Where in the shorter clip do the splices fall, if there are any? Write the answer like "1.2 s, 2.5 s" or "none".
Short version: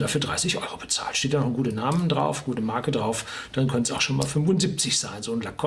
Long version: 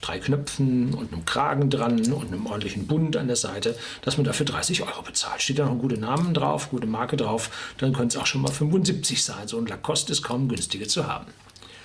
none

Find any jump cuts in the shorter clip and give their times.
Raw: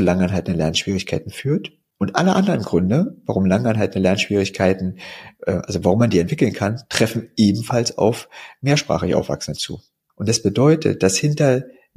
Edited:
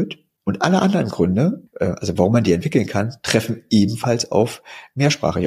1.7 s

